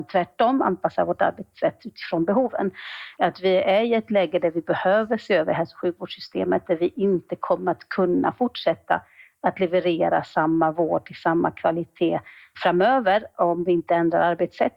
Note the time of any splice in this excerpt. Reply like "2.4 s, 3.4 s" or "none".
3.1 s, 12.5 s